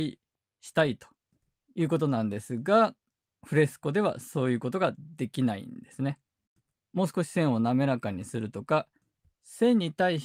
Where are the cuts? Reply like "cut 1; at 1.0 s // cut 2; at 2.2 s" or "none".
cut 1; at 6.7 s